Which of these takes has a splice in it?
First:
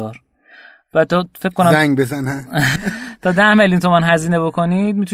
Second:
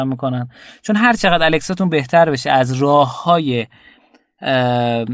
first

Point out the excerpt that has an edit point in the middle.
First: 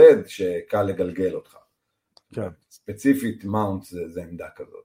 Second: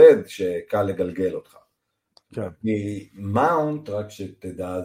second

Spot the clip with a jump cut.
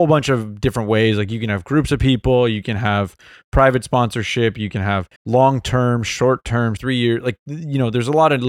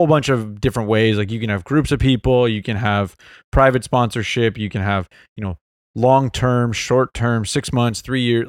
first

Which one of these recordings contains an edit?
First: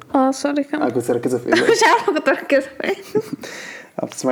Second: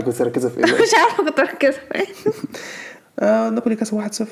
second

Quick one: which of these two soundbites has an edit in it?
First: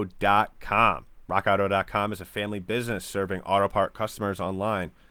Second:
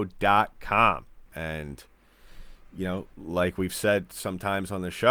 second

